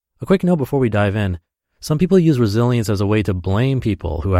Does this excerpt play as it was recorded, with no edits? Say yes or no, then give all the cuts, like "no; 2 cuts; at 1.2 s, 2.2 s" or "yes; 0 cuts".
yes; 0 cuts